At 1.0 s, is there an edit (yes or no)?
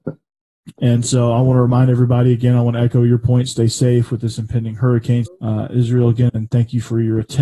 no